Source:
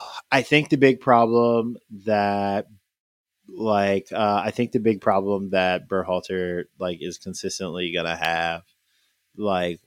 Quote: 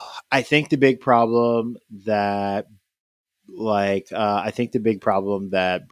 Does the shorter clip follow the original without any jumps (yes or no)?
yes